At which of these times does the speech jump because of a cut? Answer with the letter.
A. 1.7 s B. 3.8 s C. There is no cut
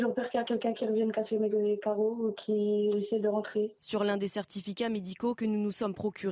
B